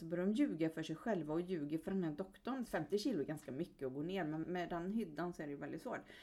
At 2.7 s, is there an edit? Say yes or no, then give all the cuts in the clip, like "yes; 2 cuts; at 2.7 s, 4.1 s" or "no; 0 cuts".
yes; 2 cuts; at 2.7 s, 4.4 s